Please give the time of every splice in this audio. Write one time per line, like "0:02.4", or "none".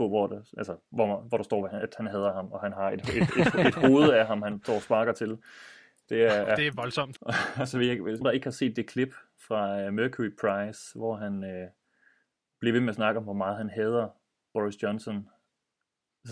0:07.2
0:08.2